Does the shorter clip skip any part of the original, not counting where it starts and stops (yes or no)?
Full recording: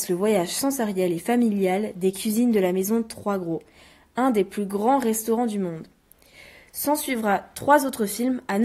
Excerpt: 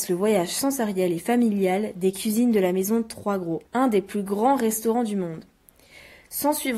yes